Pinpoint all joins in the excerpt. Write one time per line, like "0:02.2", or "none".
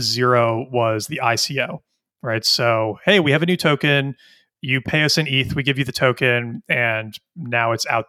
none